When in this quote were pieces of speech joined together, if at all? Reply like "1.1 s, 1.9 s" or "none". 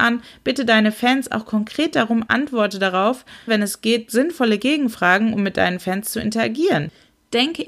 2.3 s, 3.5 s